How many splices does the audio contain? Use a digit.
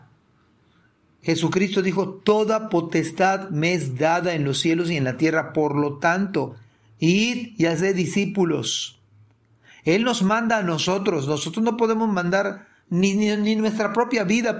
0